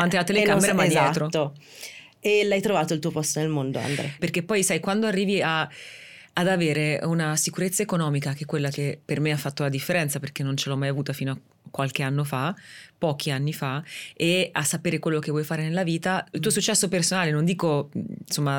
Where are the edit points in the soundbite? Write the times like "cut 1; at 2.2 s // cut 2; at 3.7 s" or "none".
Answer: cut 1; at 4.2 s // cut 2; at 16.3 s